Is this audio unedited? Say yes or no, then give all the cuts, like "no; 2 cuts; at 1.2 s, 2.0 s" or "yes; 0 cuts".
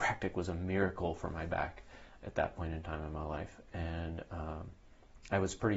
yes; 0 cuts